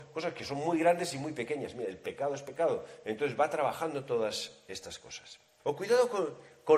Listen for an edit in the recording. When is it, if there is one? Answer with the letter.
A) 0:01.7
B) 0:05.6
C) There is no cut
B